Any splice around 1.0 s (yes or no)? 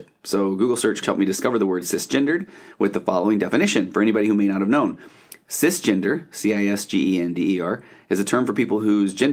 yes